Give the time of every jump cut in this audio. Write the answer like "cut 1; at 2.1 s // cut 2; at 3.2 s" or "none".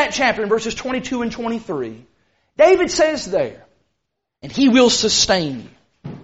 cut 1; at 4.3 s